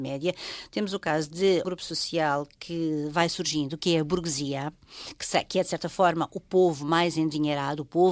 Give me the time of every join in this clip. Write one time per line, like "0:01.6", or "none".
0:01.6